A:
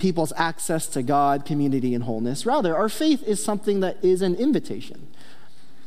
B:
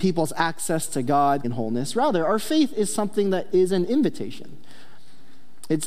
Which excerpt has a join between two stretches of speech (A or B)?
B